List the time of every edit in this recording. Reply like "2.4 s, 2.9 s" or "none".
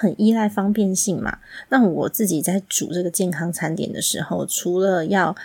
none